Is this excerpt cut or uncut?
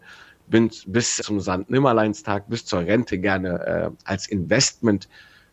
cut